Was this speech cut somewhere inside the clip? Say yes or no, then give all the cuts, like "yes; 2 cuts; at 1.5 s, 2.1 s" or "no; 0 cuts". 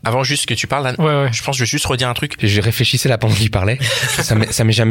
yes; 1 cut; at 2.4 s